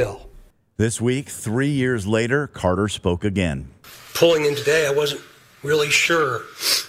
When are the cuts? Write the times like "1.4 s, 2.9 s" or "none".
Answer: none